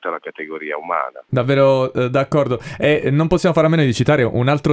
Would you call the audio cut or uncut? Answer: cut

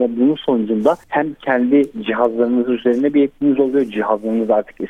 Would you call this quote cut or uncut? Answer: cut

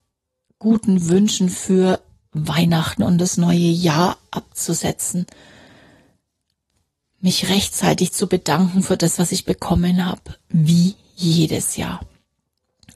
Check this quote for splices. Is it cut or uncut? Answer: uncut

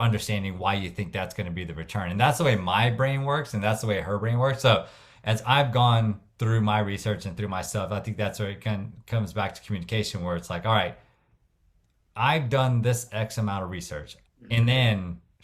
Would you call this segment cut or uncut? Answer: cut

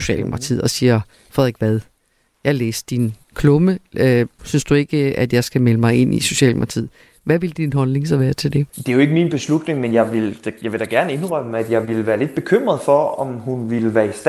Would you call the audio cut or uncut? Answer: cut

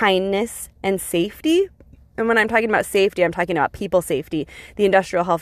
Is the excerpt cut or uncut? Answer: uncut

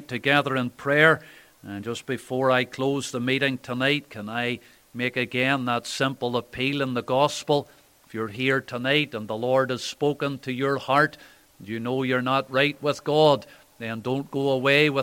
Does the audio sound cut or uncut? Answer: uncut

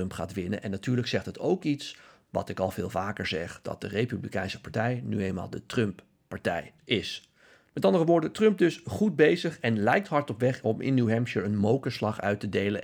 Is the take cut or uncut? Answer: cut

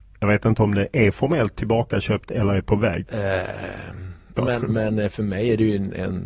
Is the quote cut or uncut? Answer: cut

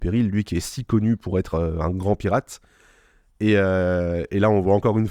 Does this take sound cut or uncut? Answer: uncut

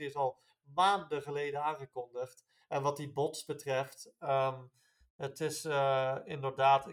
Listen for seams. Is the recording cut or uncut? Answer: cut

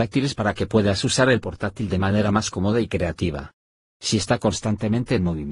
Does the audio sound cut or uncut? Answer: cut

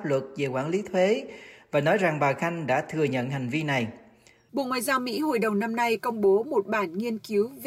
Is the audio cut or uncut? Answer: cut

